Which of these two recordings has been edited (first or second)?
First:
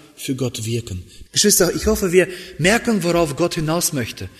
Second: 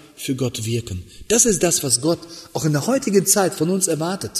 first